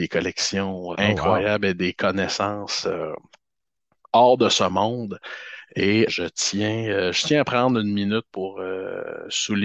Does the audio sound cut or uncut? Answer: cut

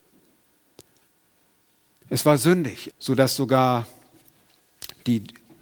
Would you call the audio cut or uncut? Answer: cut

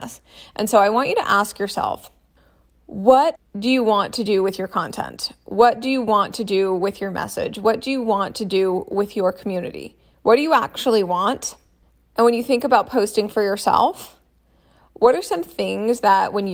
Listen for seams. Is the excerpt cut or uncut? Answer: uncut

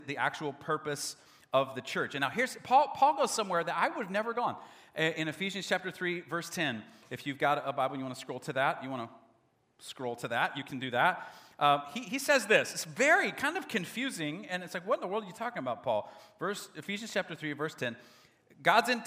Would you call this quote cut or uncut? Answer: uncut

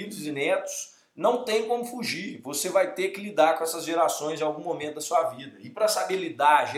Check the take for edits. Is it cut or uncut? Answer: uncut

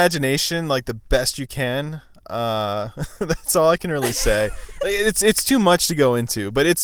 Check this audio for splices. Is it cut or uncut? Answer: uncut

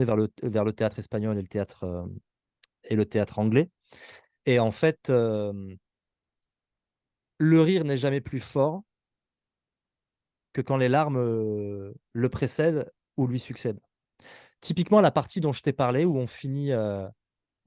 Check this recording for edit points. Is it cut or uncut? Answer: uncut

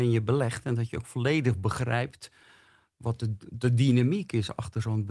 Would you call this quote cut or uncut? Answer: uncut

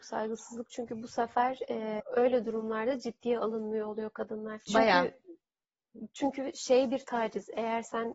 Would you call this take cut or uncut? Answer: cut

